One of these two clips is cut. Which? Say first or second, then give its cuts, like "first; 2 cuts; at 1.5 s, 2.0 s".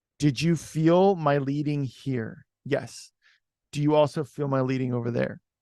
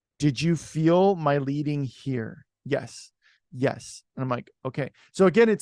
second; 1 cut; at 3.4 s